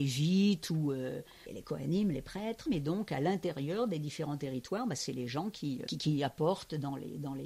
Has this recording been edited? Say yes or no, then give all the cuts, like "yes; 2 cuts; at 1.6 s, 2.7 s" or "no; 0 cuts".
yes; 2 cuts; at 2.7 s, 5.9 s